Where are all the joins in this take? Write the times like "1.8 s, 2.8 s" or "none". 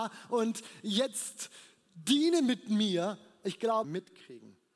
3.8 s